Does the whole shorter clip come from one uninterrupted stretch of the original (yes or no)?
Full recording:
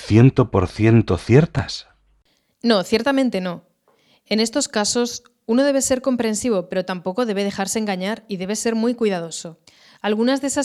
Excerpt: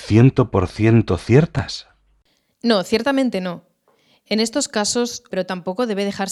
no